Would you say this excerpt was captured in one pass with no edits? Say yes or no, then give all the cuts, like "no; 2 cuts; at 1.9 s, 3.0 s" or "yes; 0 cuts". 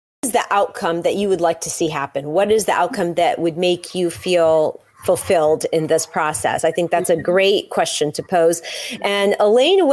yes; 0 cuts